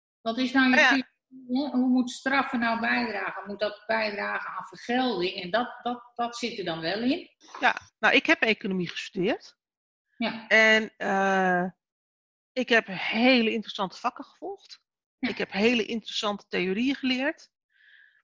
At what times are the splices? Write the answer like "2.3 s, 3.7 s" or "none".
7.4 s